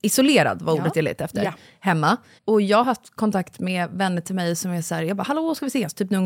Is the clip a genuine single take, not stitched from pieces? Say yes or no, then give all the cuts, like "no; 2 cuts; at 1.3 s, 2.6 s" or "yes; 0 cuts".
yes; 0 cuts